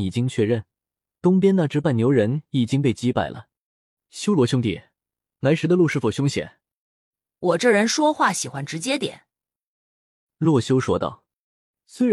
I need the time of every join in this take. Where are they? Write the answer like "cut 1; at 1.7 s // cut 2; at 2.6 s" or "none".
cut 1; at 7.3 s